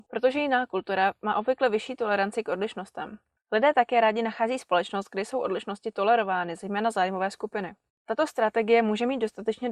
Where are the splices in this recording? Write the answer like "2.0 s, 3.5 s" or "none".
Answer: none